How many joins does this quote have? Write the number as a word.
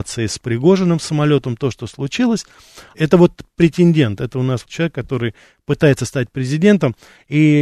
two